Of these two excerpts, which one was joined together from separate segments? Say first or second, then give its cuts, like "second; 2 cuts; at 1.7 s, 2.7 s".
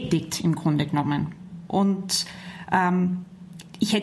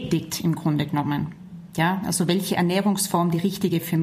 first; 1 cut; at 1.7 s